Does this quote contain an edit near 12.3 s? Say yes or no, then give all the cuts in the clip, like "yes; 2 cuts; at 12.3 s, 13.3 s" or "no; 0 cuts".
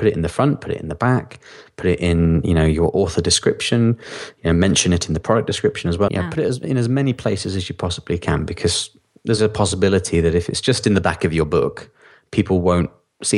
no; 2 cuts; at 6.1 s, 9.4 s